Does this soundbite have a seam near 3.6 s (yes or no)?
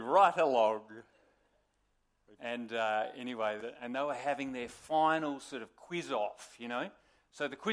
yes